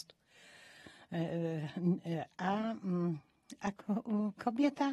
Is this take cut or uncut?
uncut